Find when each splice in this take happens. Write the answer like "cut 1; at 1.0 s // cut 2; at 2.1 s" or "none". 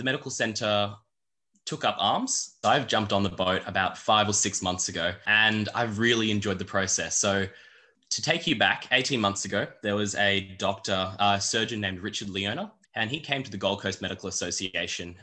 cut 1; at 2.6 s